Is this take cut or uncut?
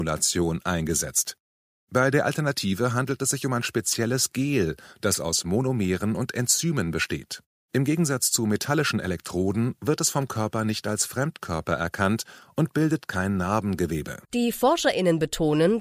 cut